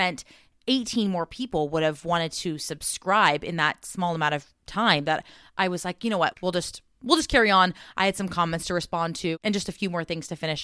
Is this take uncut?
no; 1 cut; at 6.3 s

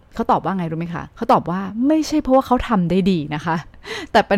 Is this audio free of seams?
no; 1 cut; at 1.1 s

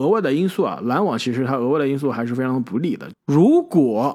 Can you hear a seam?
yes; 1 cut; at 3.1 s

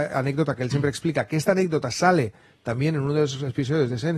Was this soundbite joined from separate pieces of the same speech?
no; 0 cuts

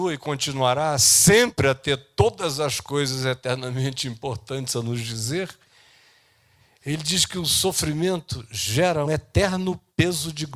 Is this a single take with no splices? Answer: no; 1 cut; at 9.0 s

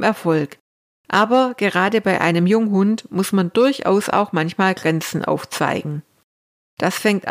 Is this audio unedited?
yes; 0 cuts

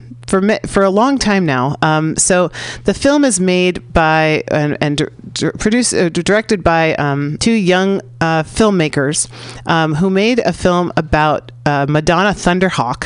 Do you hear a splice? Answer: yes; 1 cut; at 7.4 s

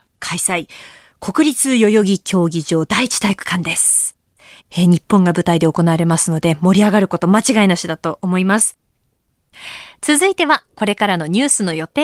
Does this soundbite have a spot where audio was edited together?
no; 0 cuts

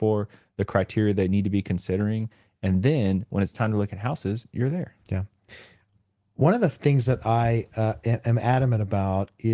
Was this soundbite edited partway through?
no; 0 cuts

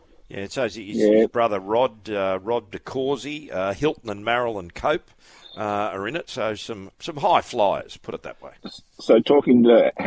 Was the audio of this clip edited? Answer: no; 0 cuts

